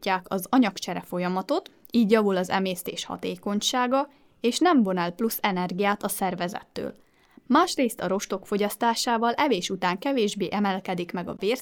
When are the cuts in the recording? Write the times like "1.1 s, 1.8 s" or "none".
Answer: none